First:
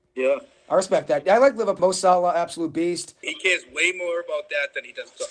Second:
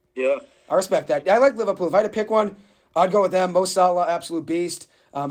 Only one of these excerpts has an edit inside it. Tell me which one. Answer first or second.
first